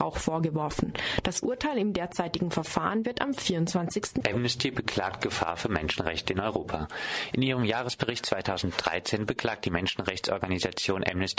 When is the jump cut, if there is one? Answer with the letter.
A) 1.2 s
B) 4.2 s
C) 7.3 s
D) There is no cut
B